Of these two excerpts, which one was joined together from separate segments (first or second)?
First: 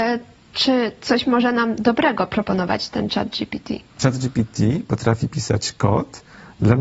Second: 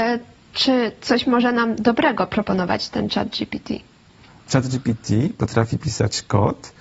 first